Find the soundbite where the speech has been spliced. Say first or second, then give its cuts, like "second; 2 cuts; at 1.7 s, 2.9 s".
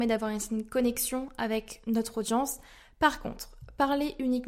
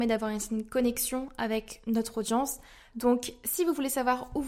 second; 1 cut; at 2.9 s